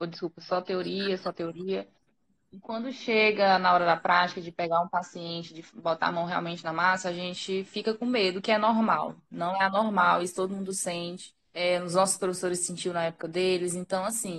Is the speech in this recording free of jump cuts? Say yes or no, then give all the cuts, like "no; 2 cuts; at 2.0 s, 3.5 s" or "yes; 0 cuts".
no; 1 cut; at 11.4 s